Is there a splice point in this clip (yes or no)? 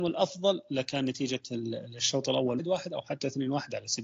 yes